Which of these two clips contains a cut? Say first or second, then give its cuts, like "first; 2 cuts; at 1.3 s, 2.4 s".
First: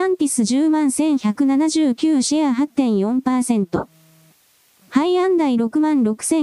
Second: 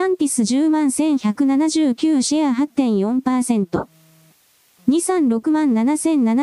first; 1 cut; at 4.8 s